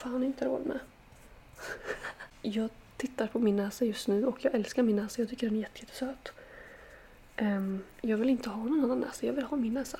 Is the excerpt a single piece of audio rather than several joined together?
yes; 0 cuts

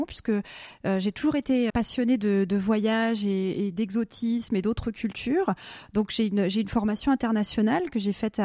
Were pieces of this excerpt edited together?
yes; 1 cut; at 1.7 s

